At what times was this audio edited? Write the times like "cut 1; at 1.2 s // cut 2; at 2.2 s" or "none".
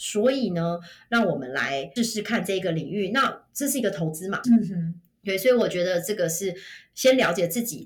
cut 1; at 2.0 s // cut 2; at 4.4 s